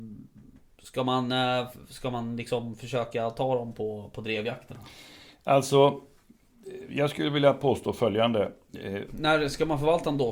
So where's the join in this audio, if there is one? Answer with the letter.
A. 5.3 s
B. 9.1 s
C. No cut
B